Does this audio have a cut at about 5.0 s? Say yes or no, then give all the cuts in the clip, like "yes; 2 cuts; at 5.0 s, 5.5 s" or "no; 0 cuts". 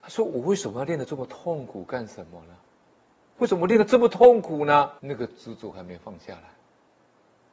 yes; 2 cuts; at 3.4 s, 5.0 s